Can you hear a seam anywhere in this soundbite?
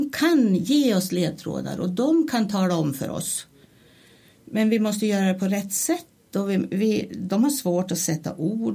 no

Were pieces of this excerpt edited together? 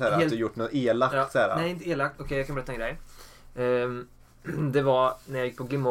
yes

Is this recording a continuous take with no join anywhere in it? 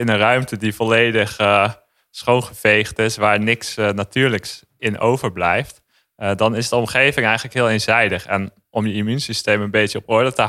yes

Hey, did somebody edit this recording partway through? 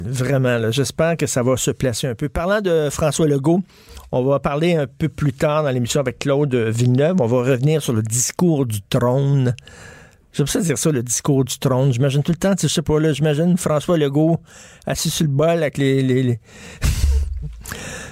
no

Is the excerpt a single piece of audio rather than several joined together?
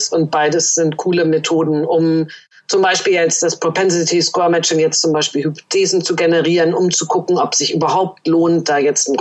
yes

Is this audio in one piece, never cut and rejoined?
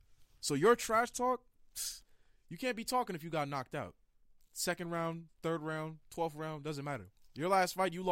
yes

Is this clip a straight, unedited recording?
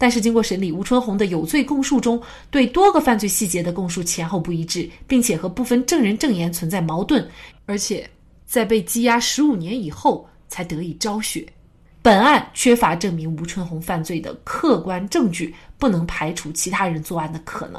no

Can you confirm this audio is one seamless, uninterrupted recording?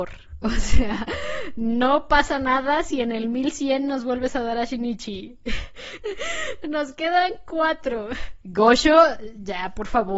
no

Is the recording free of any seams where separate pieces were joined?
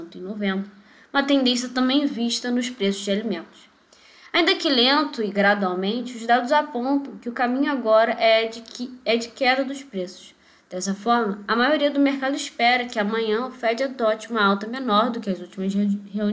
yes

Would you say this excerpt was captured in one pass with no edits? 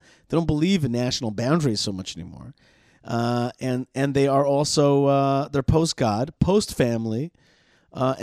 no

